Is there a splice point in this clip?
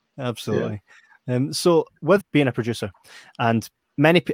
yes; 1 cut; at 2.2 s

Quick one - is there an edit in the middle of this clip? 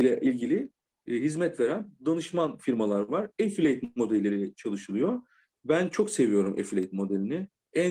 no; 0 cuts

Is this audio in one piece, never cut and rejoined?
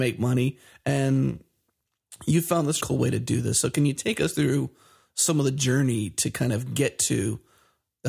no; 1 cut; at 2.8 s

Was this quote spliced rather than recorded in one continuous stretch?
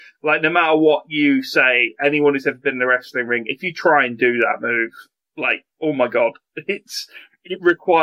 yes; 1 cut; at 5.7 s

